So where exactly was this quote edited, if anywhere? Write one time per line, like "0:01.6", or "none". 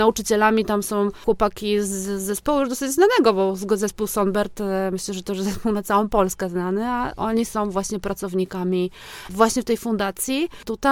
none